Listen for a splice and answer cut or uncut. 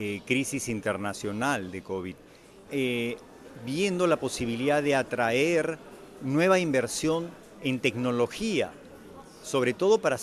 cut